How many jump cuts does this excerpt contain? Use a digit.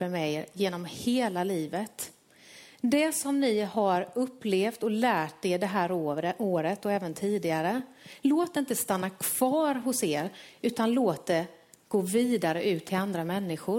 0